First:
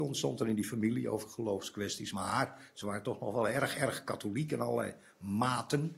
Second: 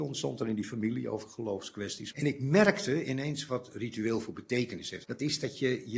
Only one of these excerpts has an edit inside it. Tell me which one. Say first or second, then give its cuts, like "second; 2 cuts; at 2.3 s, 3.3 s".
second; 2 cuts; at 2.1 s, 5.0 s